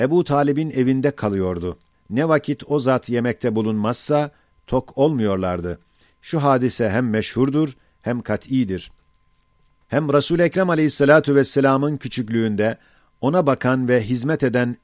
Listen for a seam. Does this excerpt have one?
yes; 1 cut; at 1.9 s

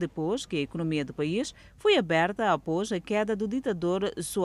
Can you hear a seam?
no; 0 cuts

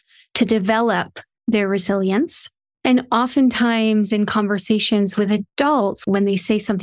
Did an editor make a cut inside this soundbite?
no; 0 cuts

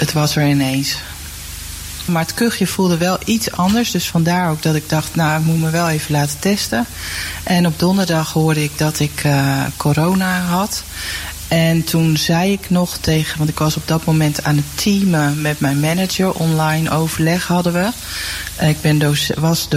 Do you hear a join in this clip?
yes; 1 cut; at 2.1 s

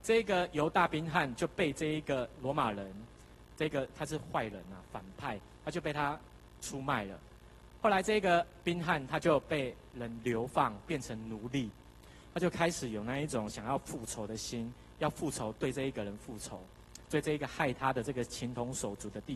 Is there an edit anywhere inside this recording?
no; 0 cuts

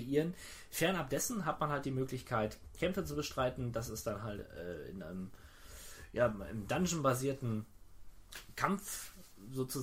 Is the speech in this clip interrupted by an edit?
no; 0 cuts

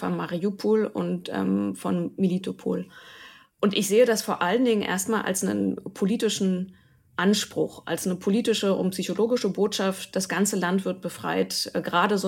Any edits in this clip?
no; 0 cuts

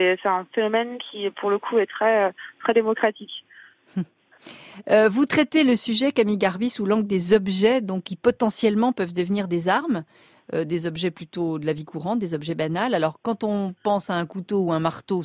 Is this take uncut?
yes; 0 cuts

